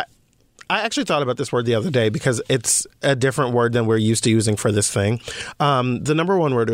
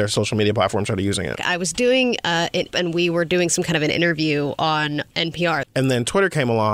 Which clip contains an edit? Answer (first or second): second